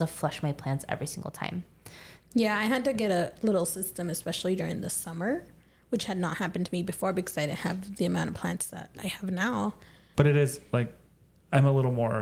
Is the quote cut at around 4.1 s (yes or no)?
no